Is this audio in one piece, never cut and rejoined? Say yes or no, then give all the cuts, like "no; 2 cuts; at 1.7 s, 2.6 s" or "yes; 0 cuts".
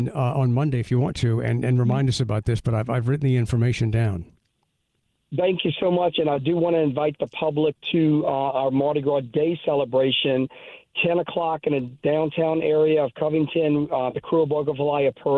yes; 0 cuts